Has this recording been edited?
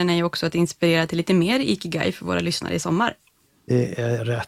no; 0 cuts

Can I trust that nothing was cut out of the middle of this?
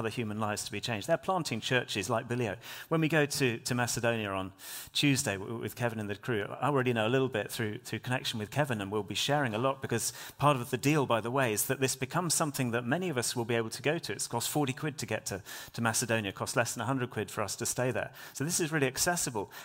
yes; 0 cuts

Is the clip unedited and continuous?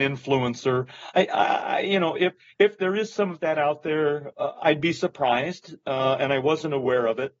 yes; 0 cuts

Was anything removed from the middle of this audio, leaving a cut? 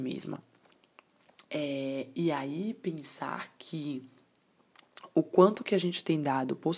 yes; 1 cut; at 1.4 s

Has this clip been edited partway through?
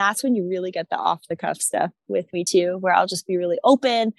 no; 0 cuts

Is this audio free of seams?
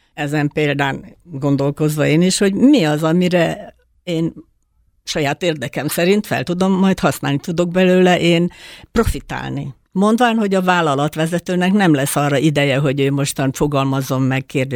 no; 1 cut; at 9.9 s

